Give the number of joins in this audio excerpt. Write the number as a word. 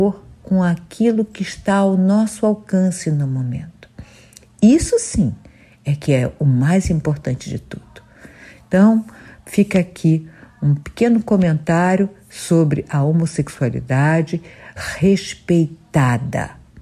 one